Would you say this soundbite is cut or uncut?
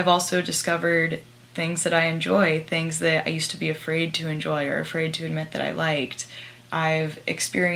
uncut